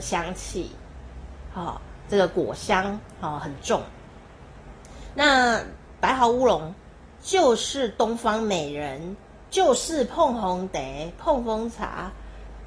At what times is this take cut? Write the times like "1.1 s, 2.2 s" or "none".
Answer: none

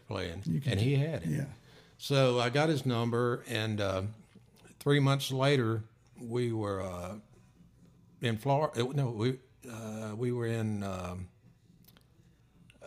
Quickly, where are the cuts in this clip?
none

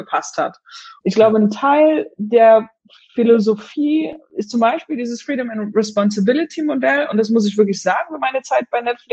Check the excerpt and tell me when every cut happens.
1.0 s

